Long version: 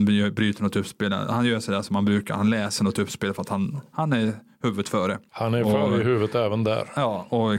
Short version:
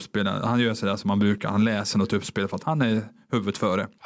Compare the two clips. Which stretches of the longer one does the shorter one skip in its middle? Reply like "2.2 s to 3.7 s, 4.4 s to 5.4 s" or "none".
3.5 s to 3.9 s